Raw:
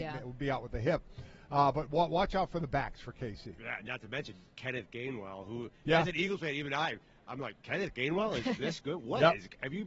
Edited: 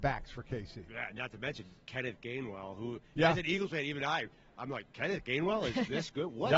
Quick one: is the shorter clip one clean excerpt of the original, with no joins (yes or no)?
yes